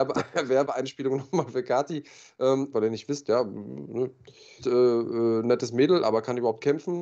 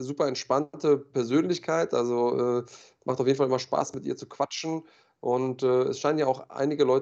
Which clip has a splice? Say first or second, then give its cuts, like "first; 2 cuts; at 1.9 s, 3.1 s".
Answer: first; 2 cuts; at 2.7 s, 4.6 s